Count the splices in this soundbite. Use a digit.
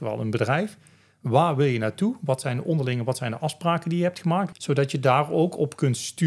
1